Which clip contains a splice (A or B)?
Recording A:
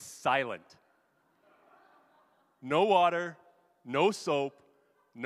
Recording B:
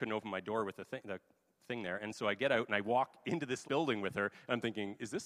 B